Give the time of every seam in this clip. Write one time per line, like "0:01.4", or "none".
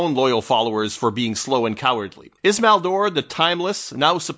0:02.4